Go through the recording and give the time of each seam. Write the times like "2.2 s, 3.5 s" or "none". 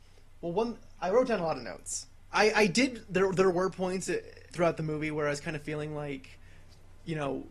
2.3 s, 4.5 s